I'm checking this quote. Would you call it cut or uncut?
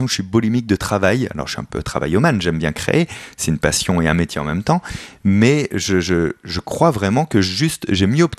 uncut